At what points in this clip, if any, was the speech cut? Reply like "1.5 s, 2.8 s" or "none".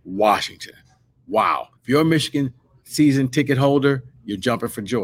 1.8 s